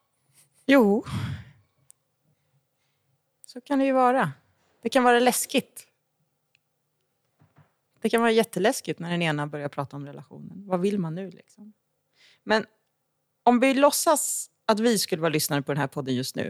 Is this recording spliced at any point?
no; 0 cuts

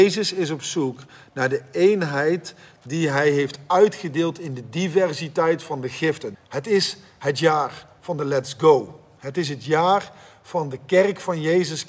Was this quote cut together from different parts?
yes; 1 cut; at 6.3 s

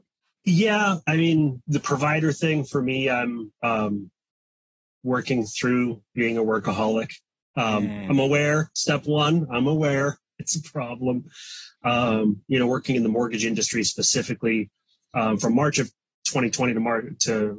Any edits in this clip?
yes; 1 cut; at 1.6 s

